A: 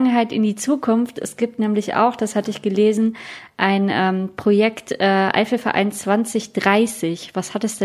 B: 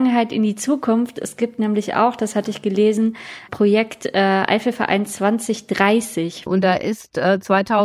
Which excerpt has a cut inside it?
B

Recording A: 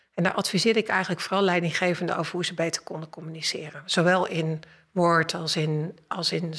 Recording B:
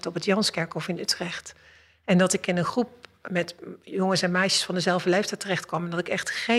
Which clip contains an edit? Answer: B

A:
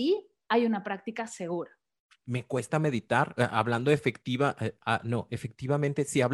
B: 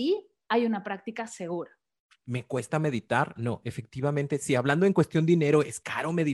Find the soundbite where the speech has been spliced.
B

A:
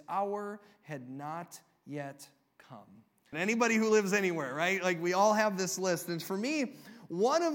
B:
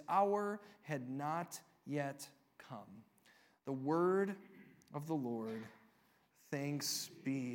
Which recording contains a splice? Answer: A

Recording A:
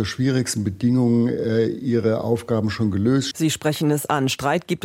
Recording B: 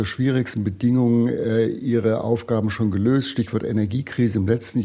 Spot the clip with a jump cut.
A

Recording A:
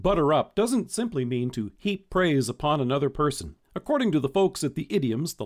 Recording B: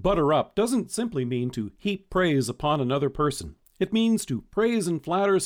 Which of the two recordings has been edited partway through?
A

